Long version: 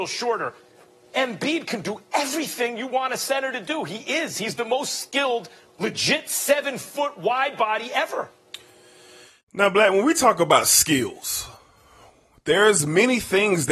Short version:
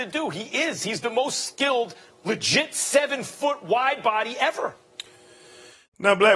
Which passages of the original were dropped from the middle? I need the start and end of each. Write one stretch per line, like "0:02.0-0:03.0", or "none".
none